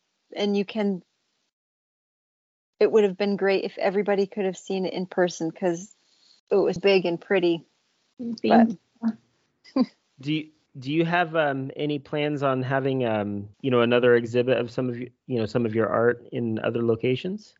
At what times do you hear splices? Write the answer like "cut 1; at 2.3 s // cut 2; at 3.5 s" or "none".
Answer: cut 1; at 6.8 s // cut 2; at 13.5 s